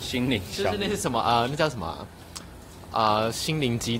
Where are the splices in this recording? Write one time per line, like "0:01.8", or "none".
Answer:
none